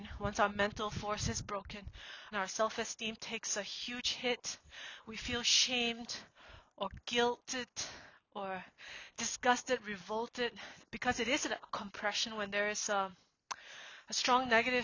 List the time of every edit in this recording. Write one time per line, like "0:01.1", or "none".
0:02.3
0:10.8